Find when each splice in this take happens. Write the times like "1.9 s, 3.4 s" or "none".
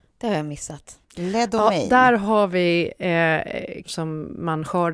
1.0 s, 3.8 s

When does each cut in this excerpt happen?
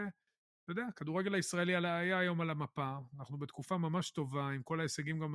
none

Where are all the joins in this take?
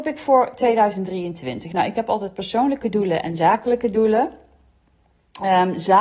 none

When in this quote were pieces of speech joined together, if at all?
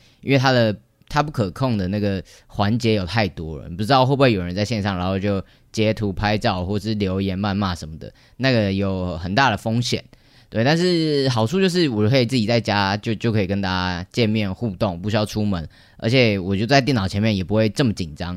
none

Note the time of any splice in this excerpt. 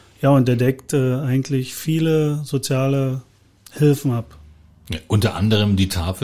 none

